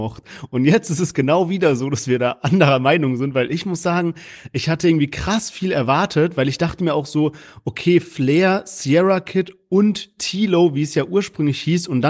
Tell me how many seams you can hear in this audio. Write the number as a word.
zero